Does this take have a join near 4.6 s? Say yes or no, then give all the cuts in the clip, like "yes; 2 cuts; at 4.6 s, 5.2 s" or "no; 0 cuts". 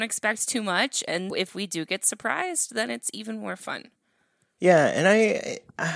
yes; 2 cuts; at 1.3 s, 4.6 s